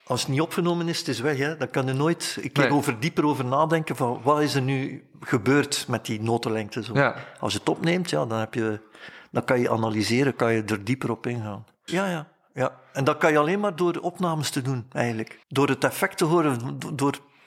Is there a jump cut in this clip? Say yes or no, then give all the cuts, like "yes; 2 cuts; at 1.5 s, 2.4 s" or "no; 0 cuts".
yes; 2 cuts; at 11.9 s, 15.4 s